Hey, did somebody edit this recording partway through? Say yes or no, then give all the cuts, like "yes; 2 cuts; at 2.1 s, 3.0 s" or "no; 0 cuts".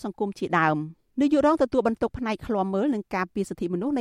yes; 1 cut; at 1.1 s